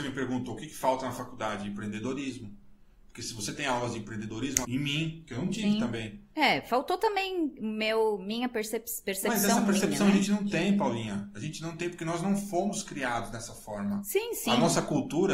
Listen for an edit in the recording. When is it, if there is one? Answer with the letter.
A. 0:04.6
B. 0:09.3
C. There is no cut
A